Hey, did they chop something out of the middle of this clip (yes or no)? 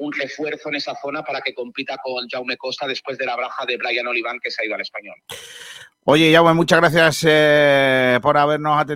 no